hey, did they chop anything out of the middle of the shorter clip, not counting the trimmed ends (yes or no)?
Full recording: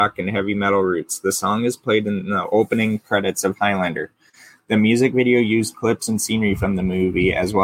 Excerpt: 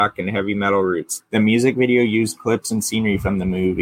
yes